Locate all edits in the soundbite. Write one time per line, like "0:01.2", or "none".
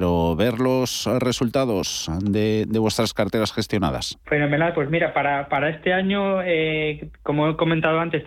0:04.2